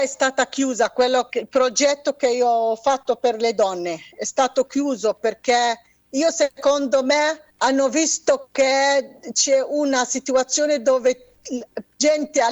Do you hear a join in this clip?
yes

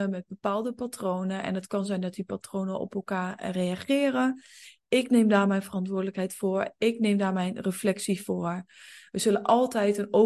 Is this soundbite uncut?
yes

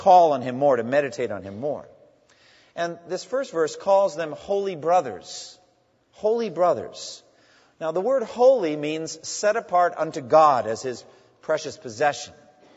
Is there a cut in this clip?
no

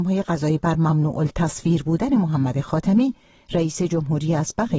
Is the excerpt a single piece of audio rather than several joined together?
yes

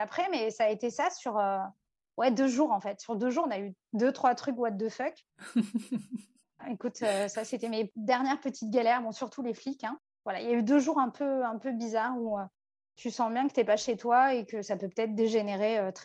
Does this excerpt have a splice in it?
no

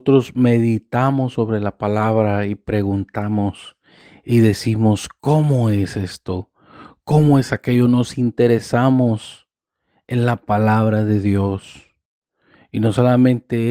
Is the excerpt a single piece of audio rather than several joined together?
yes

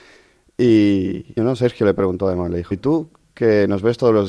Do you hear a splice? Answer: yes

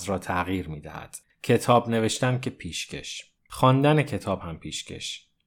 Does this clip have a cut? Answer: yes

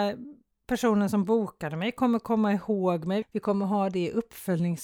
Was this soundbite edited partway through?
yes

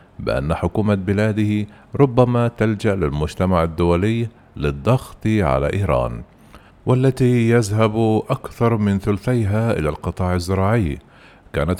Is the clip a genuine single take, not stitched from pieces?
no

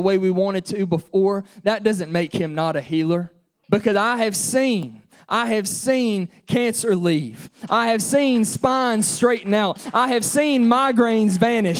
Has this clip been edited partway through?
yes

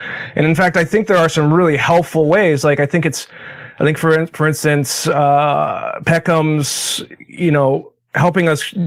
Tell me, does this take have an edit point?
no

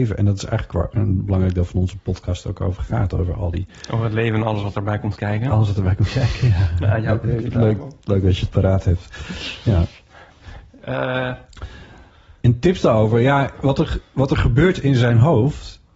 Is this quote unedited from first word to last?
yes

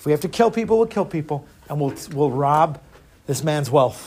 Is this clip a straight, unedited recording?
yes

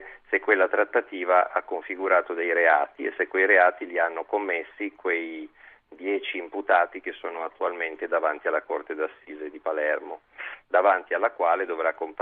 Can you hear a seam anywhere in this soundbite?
no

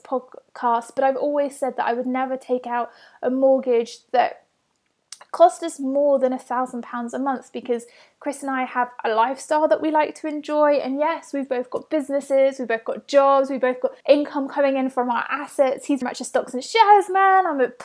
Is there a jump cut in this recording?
yes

